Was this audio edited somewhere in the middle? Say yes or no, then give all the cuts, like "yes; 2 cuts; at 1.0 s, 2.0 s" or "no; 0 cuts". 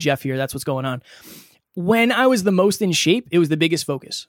no; 0 cuts